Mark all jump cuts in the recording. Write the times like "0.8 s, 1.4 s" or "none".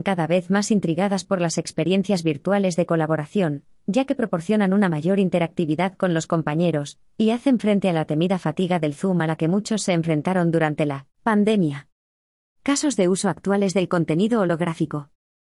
none